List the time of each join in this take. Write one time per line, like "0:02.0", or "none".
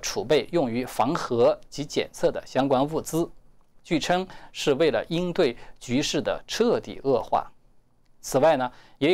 none